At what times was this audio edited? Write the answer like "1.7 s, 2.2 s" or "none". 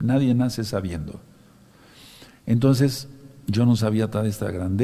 none